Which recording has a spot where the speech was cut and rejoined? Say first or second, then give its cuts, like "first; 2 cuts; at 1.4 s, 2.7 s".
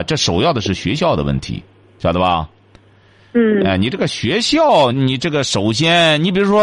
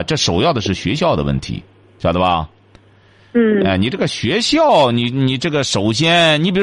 first; 1 cut; at 4.9 s